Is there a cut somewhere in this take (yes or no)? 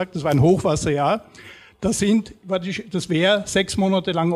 no